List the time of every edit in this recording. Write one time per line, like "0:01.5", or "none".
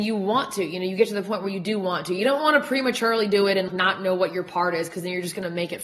0:03.7

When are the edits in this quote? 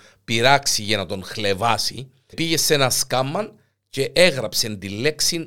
0:02.3

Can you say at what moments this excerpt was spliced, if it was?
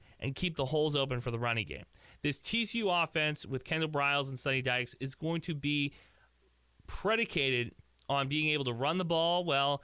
none

